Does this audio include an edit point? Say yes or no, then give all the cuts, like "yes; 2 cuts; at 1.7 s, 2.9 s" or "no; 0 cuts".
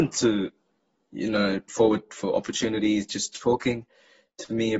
yes; 1 cut; at 1.7 s